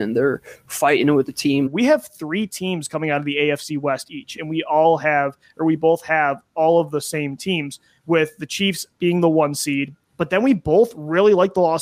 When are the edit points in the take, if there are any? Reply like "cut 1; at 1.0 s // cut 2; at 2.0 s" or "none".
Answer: cut 1; at 1.7 s